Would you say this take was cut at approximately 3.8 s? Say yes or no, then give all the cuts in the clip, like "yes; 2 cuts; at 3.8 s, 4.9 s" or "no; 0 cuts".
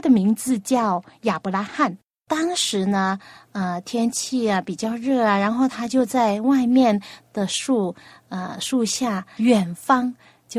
no; 2 cuts; at 2.2 s, 9.4 s